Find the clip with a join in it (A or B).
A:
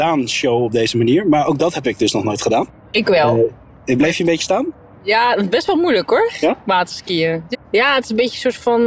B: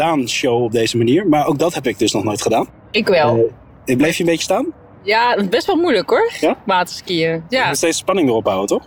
A